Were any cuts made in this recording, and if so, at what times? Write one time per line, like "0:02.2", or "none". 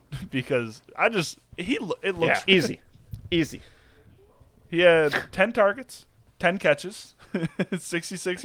0:02.5